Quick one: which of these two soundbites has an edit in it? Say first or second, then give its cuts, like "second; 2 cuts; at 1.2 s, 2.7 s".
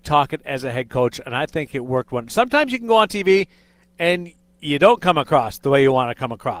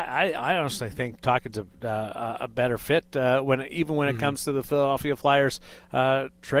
second; 1 cut; at 1.2 s